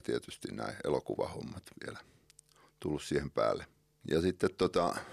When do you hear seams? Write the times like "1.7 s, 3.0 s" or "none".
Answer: 4.0 s

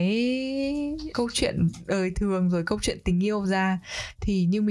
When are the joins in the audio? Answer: 1.1 s

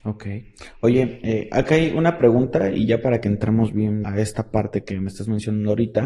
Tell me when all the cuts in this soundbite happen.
4.0 s

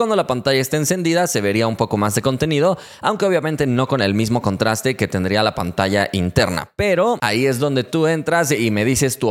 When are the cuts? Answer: none

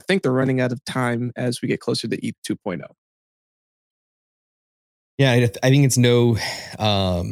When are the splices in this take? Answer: none

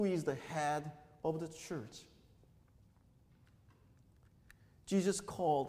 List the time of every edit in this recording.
none

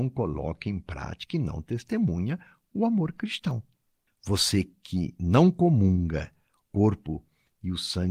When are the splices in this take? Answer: 4.1 s

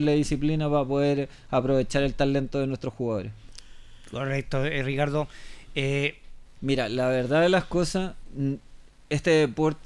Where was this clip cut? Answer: 6.5 s

